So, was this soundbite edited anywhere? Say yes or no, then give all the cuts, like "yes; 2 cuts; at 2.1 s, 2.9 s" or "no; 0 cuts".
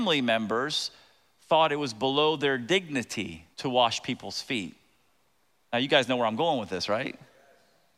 yes; 1 cut; at 3.5 s